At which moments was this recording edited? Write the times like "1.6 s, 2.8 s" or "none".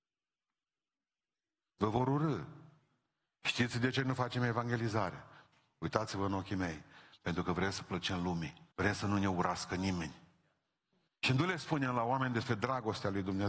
8.7 s, 11.1 s